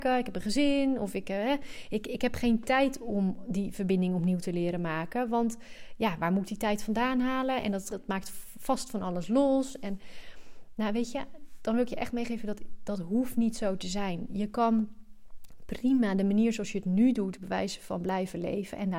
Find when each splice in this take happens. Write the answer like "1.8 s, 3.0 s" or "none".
7.9 s